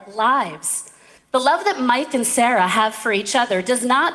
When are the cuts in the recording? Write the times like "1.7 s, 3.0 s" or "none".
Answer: 1.2 s